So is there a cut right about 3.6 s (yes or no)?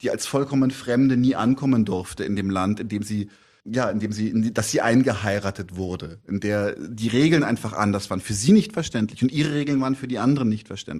yes